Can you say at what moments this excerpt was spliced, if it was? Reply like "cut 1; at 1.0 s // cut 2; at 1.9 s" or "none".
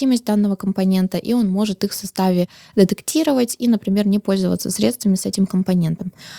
none

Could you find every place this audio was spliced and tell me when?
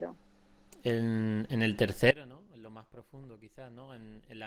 none

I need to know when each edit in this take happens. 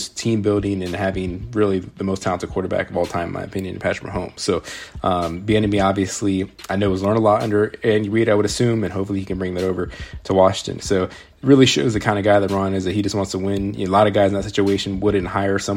cut 1; at 10.8 s

